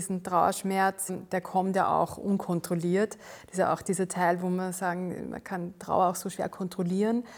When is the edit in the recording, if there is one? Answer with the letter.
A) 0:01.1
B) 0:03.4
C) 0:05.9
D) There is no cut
A